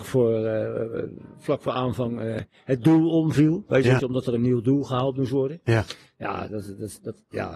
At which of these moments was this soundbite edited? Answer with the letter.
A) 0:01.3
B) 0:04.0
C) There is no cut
B